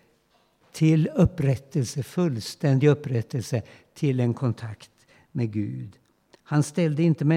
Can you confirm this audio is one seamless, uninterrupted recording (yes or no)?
yes